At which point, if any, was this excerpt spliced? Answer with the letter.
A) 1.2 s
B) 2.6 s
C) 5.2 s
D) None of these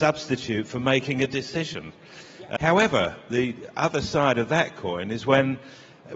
B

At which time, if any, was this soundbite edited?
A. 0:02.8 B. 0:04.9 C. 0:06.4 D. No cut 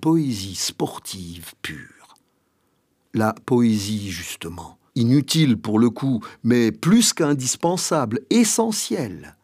B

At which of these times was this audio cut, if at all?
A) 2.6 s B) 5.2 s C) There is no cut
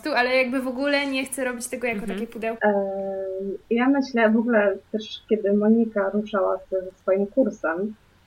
A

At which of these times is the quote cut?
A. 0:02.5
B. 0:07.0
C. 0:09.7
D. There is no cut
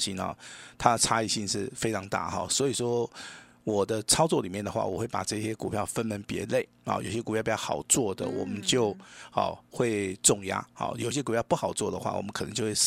D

